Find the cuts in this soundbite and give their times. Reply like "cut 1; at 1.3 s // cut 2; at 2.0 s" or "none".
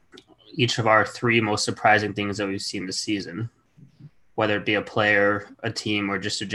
none